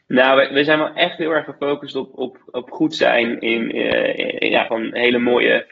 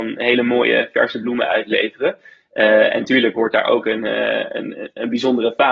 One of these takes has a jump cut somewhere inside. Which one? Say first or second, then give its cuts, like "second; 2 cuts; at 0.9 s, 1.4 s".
first; 1 cut; at 4.7 s